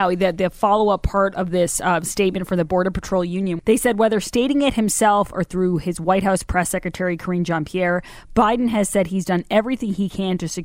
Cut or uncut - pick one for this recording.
cut